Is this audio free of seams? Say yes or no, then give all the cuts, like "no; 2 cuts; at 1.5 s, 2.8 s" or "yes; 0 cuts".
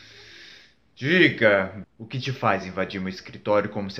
no; 1 cut; at 1.8 s